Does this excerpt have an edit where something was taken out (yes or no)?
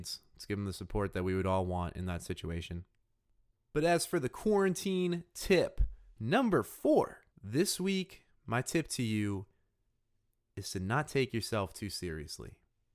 yes